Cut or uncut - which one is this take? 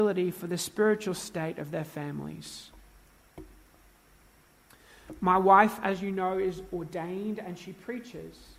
uncut